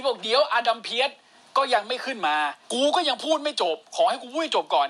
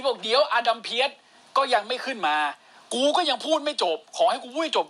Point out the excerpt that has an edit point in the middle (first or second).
first